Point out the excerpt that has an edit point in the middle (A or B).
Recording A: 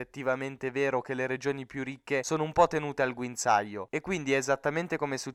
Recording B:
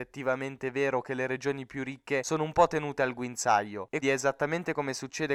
B